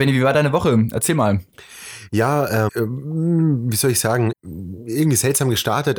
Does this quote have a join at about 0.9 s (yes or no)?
no